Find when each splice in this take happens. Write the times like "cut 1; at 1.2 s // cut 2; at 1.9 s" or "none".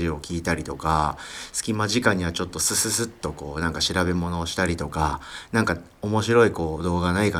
none